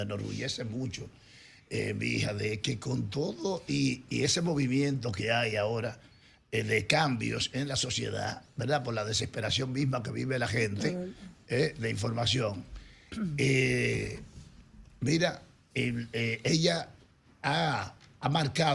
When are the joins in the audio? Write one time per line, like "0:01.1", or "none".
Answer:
none